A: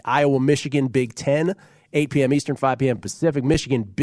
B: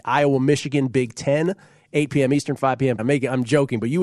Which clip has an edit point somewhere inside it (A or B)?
B